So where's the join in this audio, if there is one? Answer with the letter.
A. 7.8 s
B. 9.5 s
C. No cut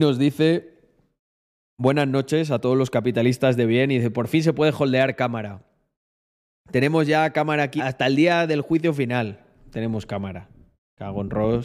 A